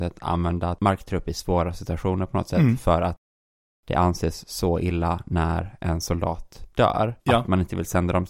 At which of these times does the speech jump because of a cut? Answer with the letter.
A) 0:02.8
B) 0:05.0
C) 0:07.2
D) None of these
C